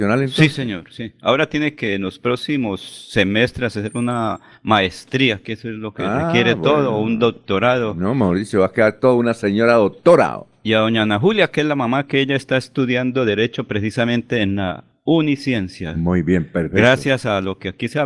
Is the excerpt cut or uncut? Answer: uncut